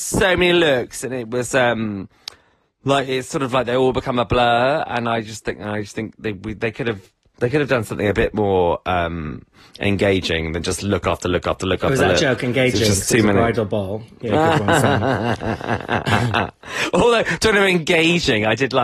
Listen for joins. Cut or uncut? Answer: uncut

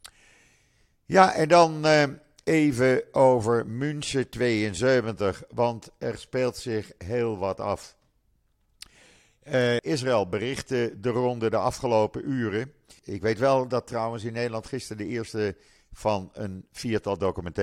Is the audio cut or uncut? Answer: cut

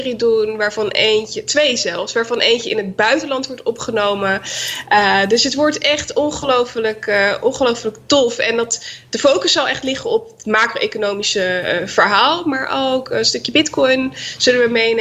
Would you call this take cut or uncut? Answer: uncut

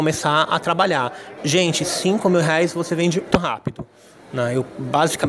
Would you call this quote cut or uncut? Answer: cut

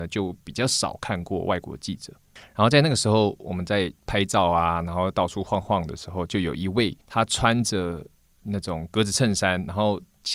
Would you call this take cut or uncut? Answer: cut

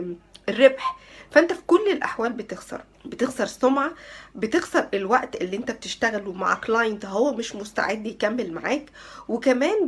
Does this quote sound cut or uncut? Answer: cut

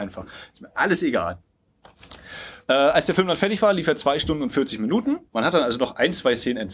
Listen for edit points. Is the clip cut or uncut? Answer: cut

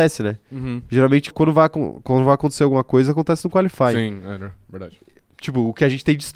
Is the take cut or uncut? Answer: cut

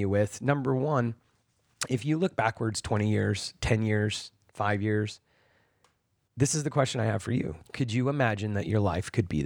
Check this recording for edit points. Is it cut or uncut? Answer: cut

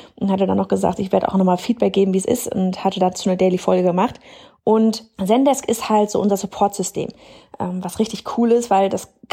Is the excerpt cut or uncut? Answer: cut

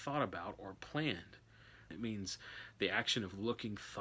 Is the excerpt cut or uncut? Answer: cut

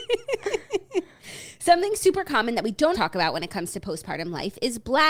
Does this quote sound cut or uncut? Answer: cut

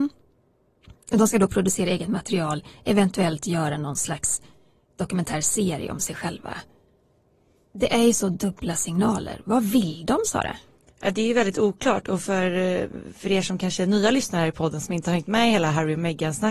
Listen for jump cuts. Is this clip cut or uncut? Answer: uncut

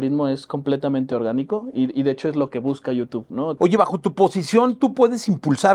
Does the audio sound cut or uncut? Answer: cut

